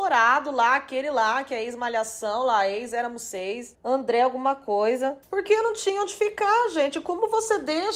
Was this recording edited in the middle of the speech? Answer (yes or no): no